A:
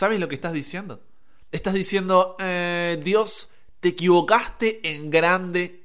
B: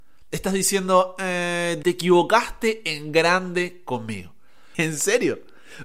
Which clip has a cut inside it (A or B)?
B